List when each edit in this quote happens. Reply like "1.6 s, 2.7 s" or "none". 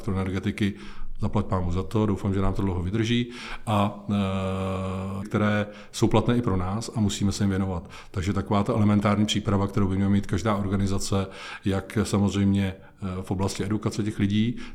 5.2 s